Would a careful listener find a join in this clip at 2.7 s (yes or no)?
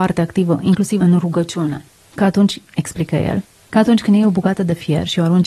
no